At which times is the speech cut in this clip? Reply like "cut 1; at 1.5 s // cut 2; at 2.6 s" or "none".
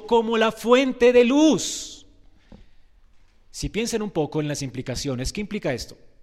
none